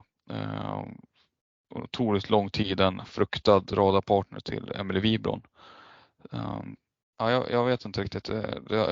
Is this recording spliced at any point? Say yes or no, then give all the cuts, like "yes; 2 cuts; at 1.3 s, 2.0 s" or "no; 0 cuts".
yes; 1 cut; at 7.0 s